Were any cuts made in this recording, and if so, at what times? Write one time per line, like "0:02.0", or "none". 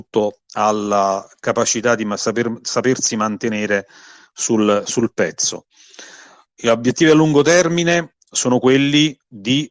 none